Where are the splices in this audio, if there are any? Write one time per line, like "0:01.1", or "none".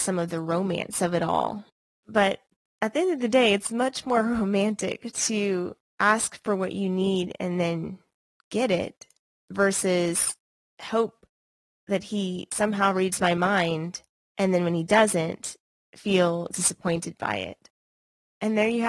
none